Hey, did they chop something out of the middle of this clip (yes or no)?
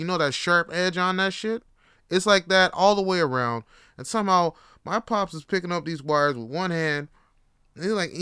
no